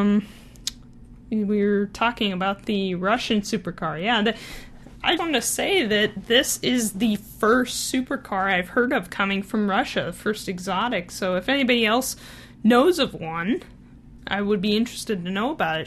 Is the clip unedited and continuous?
no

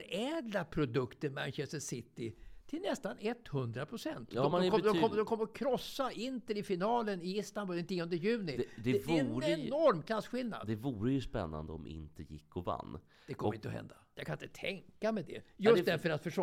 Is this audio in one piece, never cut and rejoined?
yes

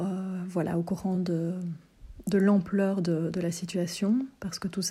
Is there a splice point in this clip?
no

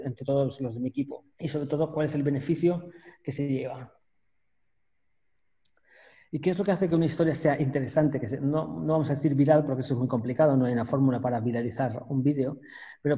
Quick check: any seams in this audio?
yes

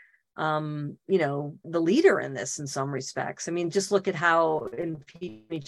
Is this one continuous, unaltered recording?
no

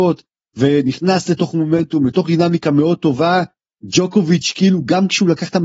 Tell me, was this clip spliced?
no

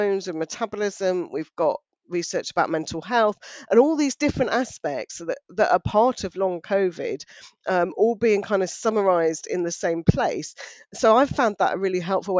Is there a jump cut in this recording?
no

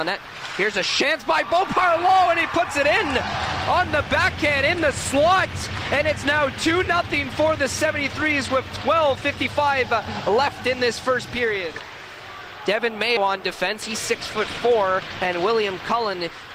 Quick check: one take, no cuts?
no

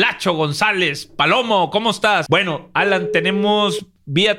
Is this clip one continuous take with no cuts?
no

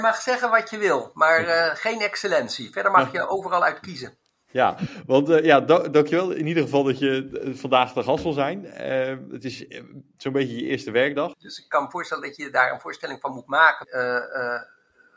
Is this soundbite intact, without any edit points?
no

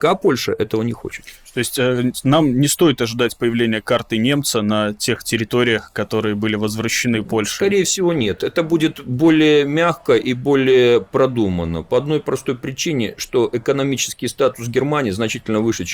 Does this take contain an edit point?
no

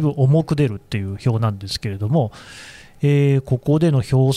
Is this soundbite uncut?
yes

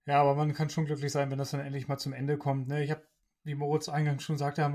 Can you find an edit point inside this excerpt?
no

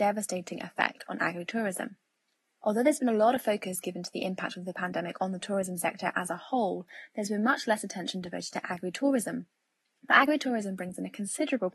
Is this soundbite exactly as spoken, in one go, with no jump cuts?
yes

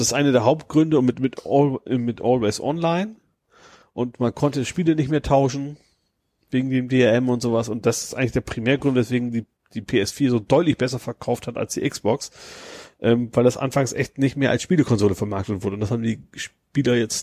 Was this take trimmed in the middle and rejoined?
no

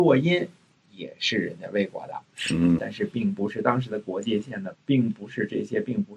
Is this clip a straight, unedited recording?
no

